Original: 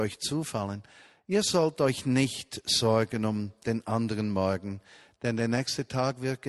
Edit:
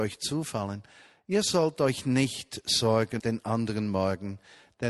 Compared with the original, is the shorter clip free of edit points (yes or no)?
no